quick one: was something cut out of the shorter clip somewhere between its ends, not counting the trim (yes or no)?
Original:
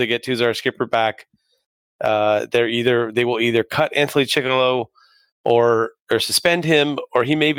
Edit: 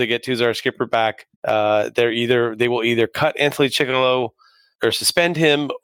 yes